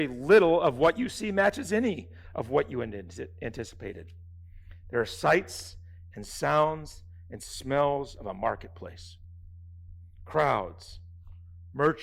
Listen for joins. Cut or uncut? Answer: uncut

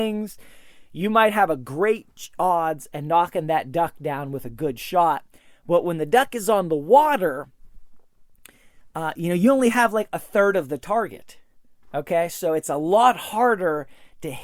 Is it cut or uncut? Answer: uncut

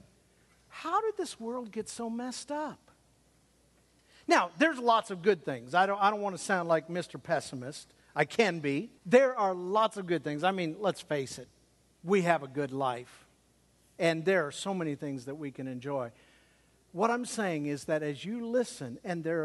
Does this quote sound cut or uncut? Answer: cut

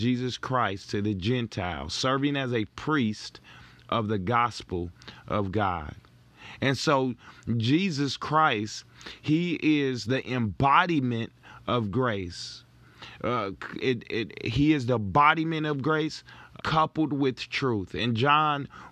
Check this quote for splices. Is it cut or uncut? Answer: cut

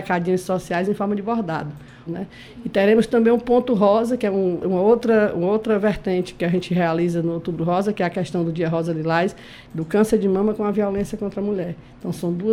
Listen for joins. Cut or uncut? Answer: cut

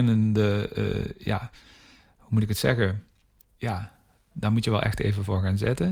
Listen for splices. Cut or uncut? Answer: cut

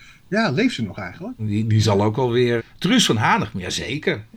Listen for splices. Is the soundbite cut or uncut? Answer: cut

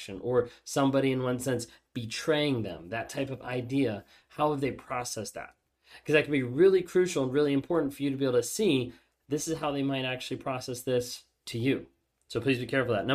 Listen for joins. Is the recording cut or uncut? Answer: uncut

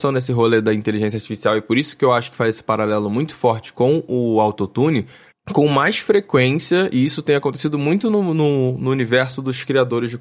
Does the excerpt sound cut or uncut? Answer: cut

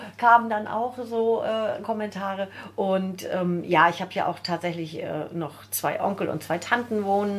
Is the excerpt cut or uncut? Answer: uncut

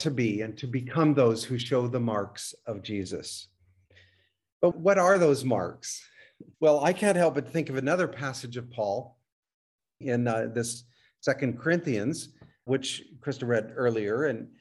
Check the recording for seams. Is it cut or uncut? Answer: cut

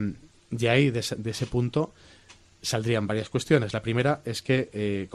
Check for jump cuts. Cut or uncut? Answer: uncut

